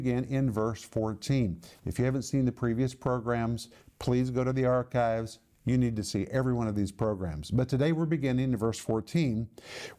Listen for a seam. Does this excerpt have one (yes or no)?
no